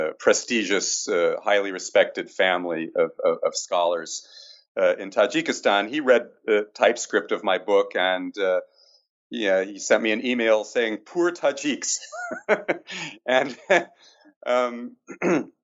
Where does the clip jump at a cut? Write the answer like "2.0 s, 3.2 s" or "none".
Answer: none